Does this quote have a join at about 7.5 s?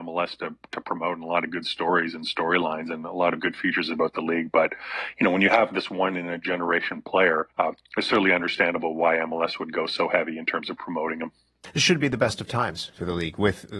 yes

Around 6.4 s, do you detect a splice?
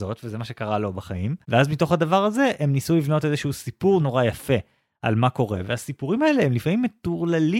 no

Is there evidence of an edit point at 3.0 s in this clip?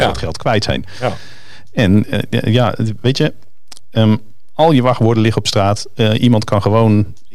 no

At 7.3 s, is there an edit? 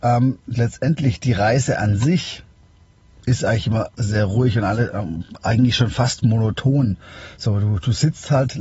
no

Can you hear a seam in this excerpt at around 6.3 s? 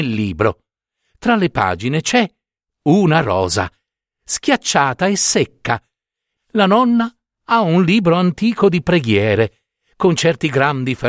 yes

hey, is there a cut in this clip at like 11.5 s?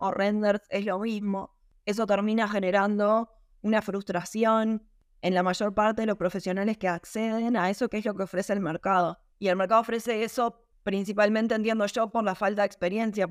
no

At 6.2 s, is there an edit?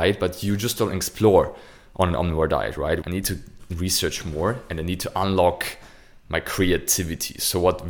no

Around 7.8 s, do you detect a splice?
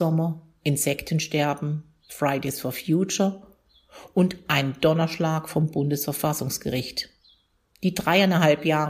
yes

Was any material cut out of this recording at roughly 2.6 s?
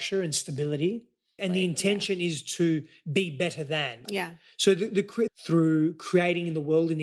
no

